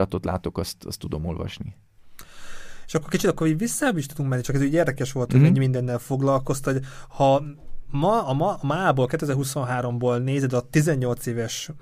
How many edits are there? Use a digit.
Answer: 0